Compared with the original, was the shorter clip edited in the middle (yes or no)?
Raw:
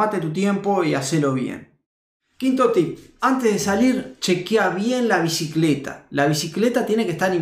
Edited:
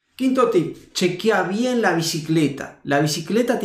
yes